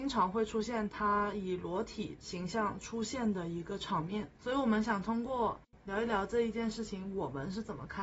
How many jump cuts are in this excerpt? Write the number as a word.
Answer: one